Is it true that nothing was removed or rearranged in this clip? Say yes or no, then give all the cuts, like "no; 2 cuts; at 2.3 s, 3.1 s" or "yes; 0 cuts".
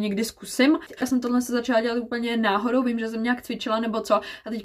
no; 1 cut; at 1.0 s